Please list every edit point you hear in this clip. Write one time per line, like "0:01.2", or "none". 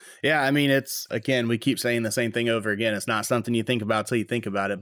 0:01.1